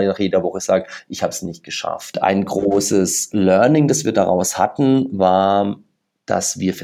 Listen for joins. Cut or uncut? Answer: uncut